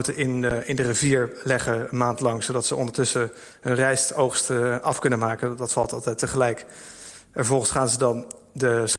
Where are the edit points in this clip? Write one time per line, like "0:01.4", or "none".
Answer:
none